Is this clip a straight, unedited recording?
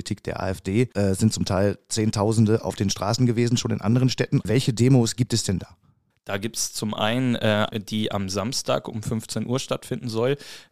no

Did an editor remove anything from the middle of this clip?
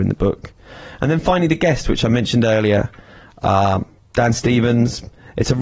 no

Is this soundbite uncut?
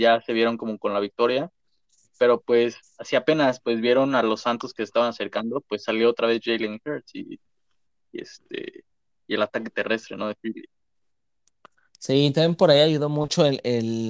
yes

